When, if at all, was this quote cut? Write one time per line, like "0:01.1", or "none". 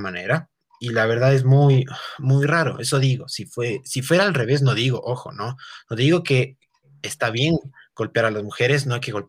none